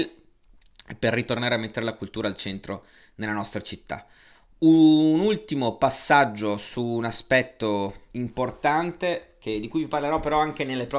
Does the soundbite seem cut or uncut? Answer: uncut